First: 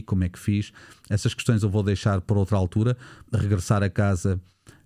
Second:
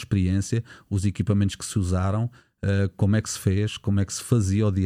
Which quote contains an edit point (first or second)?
first